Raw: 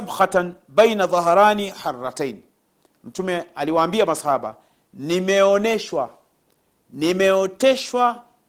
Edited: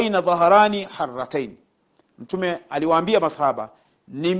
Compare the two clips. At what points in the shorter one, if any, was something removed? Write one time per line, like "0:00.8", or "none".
none